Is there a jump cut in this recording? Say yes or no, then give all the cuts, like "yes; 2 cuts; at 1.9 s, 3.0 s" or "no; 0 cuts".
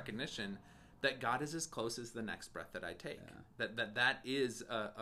no; 0 cuts